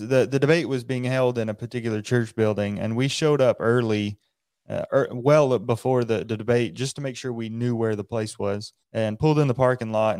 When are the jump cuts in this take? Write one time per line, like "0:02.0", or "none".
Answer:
0:08.8